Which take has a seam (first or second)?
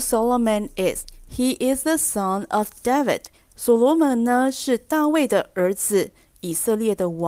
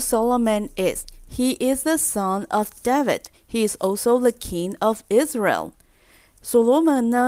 first